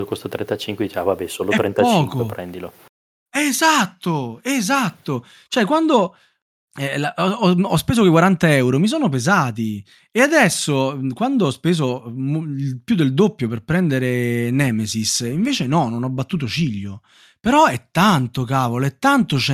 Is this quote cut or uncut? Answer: uncut